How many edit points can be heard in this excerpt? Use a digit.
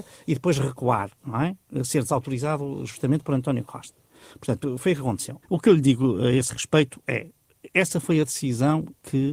1